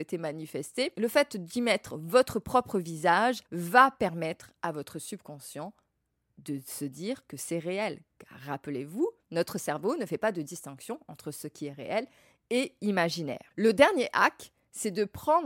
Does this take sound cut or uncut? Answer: uncut